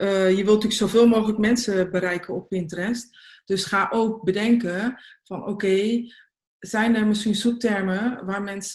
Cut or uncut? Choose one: uncut